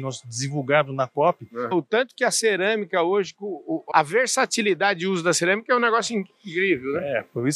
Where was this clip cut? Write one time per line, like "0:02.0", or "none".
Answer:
0:01.7
0:03.9